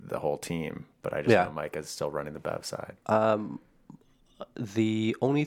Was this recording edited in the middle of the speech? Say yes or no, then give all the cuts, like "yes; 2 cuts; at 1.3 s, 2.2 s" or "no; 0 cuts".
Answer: no; 0 cuts